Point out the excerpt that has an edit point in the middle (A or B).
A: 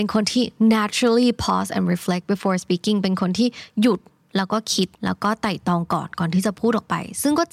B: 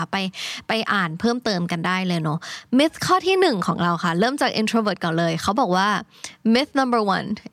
A